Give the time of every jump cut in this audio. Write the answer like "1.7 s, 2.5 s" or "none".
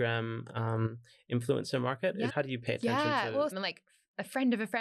2.3 s, 3.5 s

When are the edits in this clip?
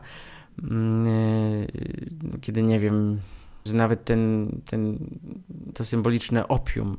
3.7 s, 5.7 s

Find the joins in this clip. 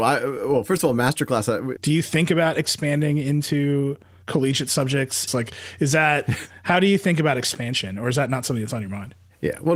1.8 s, 5.3 s

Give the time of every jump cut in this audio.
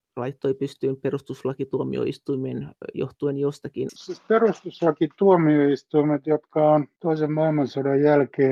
3.9 s

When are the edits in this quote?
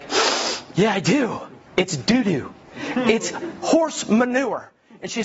1.7 s

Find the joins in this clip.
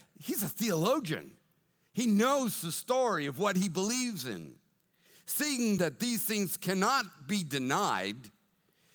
5.8 s

